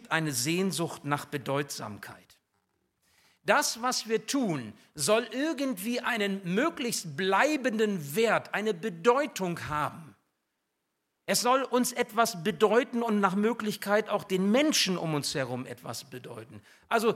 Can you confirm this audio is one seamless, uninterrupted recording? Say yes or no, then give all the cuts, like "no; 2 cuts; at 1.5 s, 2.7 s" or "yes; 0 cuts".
yes; 0 cuts